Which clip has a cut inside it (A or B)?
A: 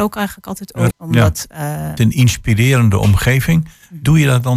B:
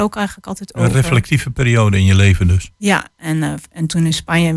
A